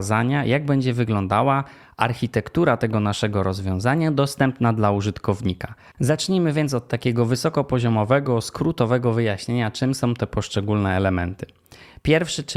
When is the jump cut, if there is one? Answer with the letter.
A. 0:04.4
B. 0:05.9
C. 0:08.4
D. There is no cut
B